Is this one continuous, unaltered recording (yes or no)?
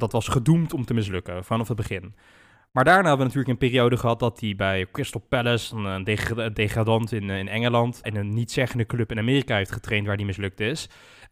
no